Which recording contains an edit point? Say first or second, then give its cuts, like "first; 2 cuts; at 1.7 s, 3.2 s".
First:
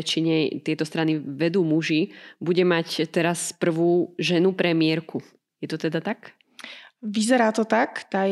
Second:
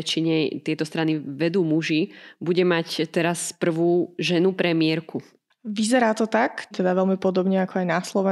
second; 2 cuts; at 5.5 s, 6.7 s